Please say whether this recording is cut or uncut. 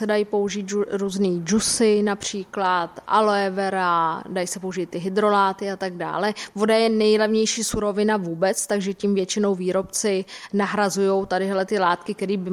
uncut